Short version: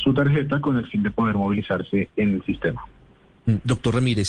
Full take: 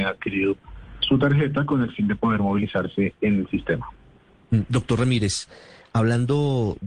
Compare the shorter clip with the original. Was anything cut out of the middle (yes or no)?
no